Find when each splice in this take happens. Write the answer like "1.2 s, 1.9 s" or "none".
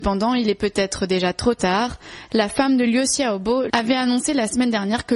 3.7 s